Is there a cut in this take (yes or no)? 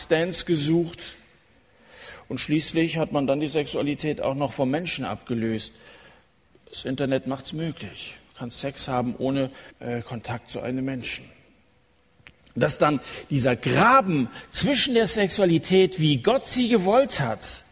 yes